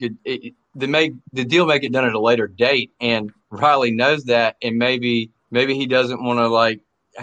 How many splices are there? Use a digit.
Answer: 1